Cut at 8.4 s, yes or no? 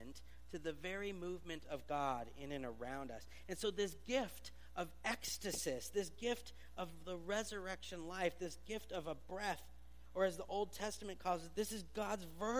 no